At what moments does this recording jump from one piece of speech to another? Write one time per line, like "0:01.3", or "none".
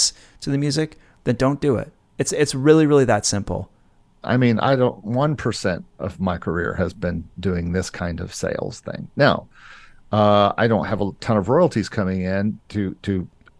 0:04.2